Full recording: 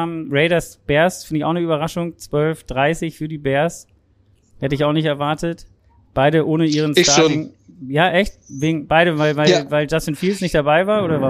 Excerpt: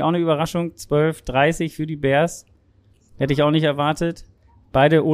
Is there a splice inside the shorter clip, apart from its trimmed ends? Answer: no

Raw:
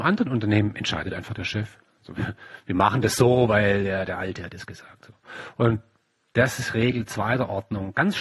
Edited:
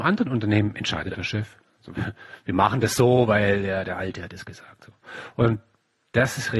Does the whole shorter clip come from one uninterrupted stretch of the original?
no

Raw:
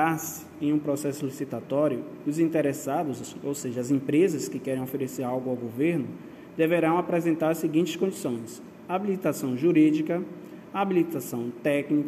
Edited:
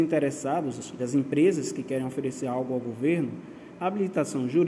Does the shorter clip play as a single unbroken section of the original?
no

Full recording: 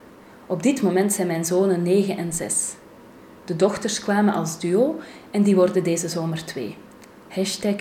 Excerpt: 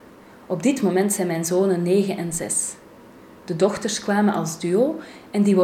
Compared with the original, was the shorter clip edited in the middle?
no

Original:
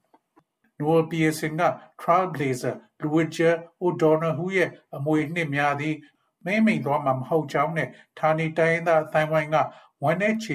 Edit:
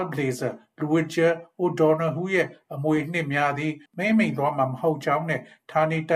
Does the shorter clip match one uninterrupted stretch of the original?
no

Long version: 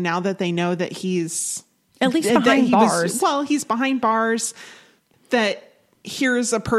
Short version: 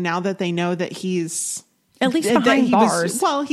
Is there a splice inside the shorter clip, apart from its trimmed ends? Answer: no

